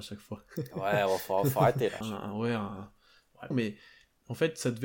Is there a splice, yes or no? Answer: yes